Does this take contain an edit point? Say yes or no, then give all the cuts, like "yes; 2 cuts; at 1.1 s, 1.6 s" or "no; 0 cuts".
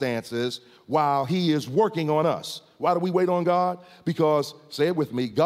no; 0 cuts